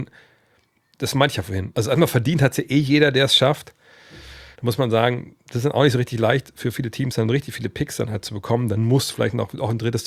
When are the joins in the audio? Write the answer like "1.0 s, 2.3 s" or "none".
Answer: 1.7 s, 4.5 s